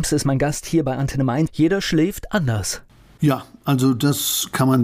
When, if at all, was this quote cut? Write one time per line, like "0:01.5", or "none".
0:01.5